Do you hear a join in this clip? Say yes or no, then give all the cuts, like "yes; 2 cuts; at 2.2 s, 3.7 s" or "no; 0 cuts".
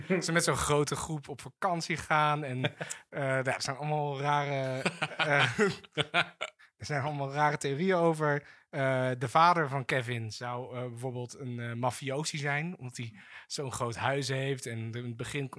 no; 0 cuts